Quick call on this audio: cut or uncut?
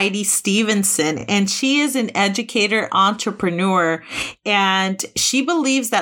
uncut